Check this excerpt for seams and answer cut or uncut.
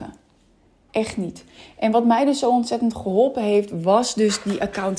uncut